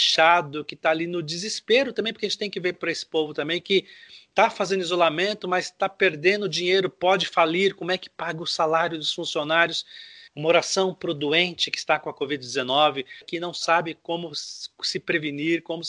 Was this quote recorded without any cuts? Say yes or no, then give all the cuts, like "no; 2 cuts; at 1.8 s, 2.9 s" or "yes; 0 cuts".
no; 2 cuts; at 10.3 s, 13.2 s